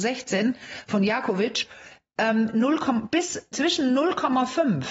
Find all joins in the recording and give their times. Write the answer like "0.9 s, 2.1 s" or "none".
3.5 s